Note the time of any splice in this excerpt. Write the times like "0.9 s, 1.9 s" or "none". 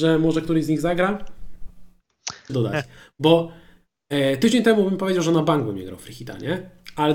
2.5 s